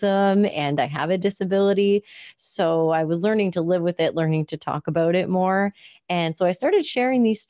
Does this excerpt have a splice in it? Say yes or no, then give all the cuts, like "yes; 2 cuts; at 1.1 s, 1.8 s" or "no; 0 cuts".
no; 0 cuts